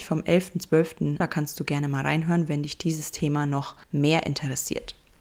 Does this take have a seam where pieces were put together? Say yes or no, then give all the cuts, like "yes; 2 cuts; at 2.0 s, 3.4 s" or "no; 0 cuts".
yes; 2 cuts; at 1.2 s, 3.8 s